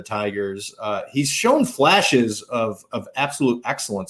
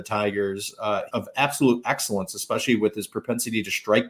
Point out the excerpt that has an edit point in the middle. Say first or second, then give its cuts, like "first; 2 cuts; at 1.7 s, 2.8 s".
second; 1 cut; at 1.1 s